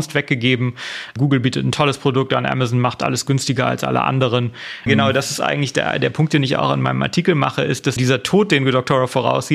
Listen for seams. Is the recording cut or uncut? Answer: cut